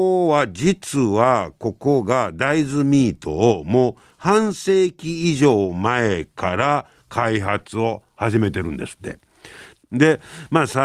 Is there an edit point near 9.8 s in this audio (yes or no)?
yes